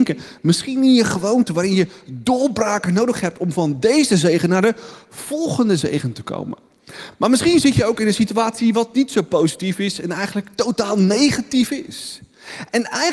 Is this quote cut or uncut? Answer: uncut